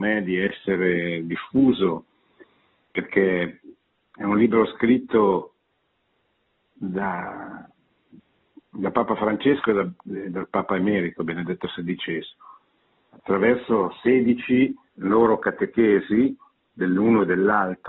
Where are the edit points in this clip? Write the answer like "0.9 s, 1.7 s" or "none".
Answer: 14.8 s